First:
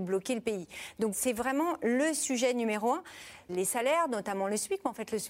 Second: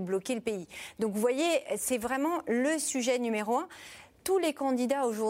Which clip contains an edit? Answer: first; 2 cuts; at 1.1 s, 3.5 s

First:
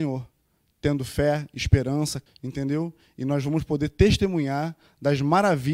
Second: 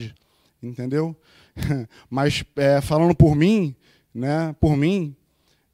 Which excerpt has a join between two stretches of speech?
first; 1 cut; at 2.3 s

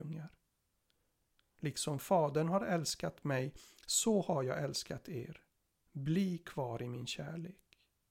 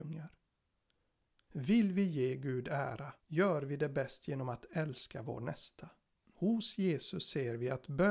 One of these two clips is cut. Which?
second; 3 cuts; at 1.5 s, 3.2 s, 6.2 s

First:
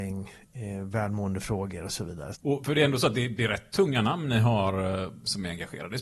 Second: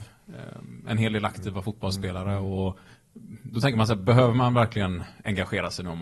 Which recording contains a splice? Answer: first; 1 cut; at 2.3 s

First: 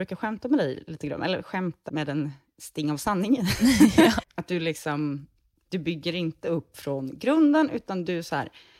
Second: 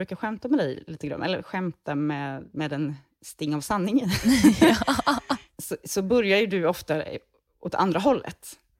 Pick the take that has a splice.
first; 2 cuts; at 1.9 s, 4.2 s

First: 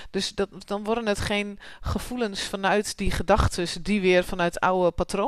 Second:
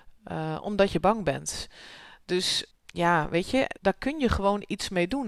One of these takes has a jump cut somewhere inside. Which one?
second; 2 cuts; at 2.7 s, 3.8 s

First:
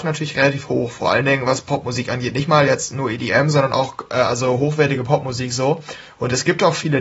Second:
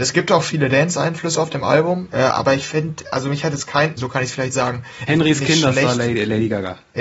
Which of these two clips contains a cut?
second; 3 cuts; at 2.1 s, 4.0 s, 5.1 s

